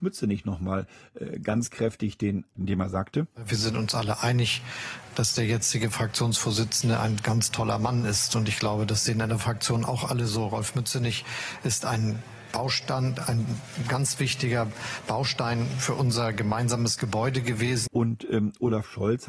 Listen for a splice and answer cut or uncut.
cut